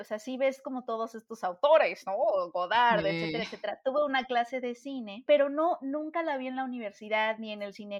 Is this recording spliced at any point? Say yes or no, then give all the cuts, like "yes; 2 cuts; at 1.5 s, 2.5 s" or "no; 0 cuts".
no; 0 cuts